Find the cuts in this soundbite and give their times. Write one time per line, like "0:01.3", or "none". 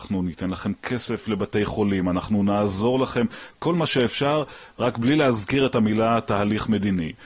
none

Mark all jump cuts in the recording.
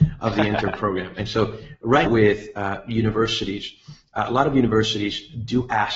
0:02.1

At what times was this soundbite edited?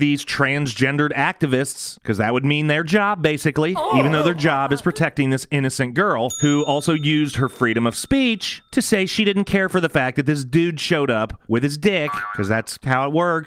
none

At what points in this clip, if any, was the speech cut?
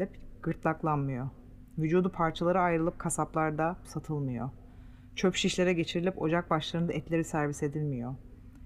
0:03.8

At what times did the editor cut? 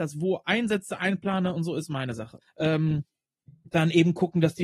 0:02.4

